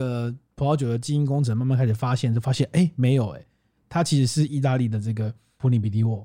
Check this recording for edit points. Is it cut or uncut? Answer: uncut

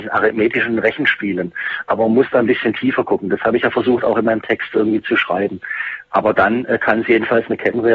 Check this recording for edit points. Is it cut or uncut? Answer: cut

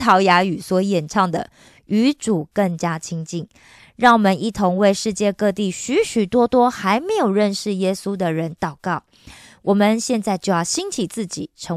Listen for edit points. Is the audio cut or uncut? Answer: uncut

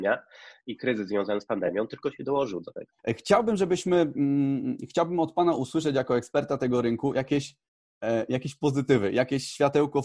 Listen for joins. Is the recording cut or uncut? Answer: cut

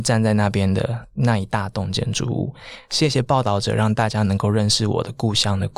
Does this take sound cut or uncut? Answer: uncut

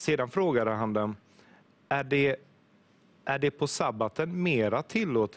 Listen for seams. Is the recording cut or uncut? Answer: uncut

